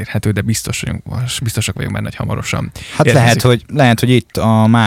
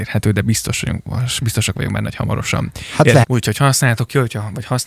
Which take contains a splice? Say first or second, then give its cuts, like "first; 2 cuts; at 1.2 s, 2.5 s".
second; 1 cut; at 3.2 s